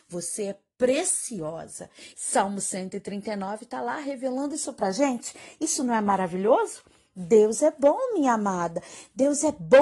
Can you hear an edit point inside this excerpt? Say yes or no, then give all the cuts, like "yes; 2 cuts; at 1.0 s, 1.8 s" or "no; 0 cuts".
yes; 1 cut; at 2.1 s